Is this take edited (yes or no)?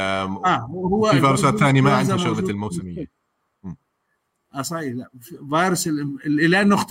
no